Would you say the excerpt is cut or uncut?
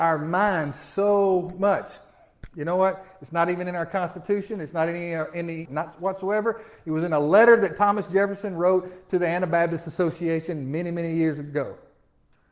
cut